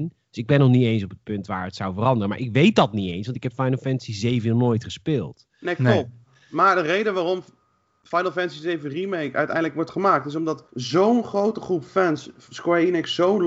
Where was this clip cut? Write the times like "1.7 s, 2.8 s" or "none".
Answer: 10.7 s